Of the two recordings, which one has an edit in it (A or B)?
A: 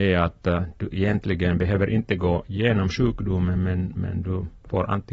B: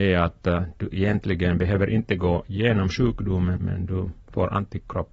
B